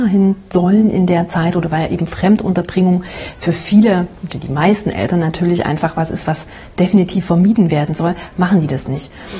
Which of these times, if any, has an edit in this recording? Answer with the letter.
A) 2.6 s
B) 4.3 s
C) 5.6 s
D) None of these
D